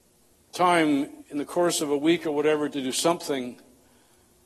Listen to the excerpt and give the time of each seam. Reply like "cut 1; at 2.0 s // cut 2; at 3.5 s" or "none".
cut 1; at 1.2 s // cut 2; at 2.7 s

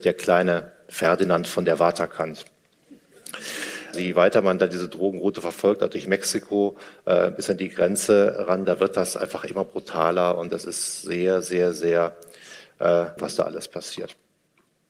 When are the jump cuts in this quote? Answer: cut 1; at 3.9 s // cut 2; at 13.2 s

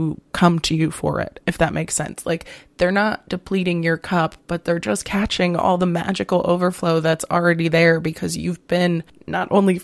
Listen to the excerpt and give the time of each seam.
none

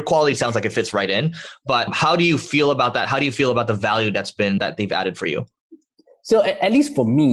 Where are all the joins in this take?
none

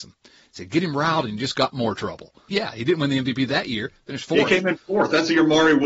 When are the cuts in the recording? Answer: cut 1; at 2.5 s

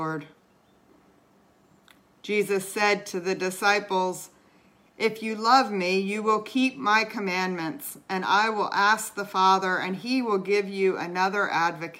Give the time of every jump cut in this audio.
none

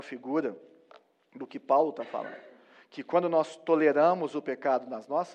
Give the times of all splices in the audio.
none

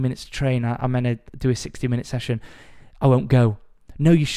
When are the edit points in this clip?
none

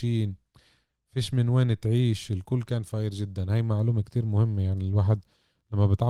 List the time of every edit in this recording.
cut 1; at 4.0 s

